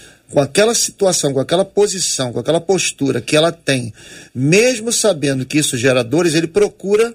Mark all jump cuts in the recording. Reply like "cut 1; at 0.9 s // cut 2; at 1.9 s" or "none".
none